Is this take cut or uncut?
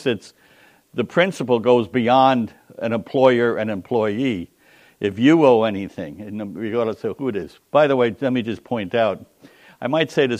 uncut